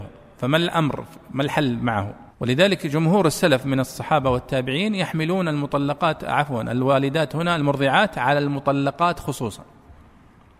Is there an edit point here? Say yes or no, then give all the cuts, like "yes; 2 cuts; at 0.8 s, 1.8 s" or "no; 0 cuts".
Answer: yes; 1 cut; at 2.3 s